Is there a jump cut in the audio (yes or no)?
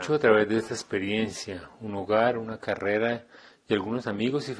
no